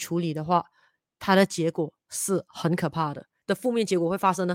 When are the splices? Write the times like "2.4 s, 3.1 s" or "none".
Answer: 3.4 s